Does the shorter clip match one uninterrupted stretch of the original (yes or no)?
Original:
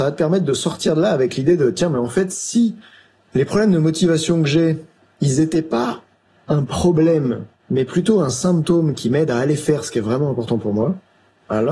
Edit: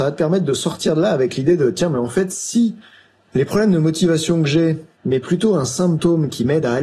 no